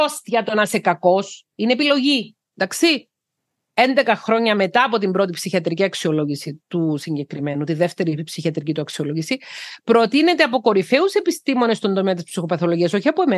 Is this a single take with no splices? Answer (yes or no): no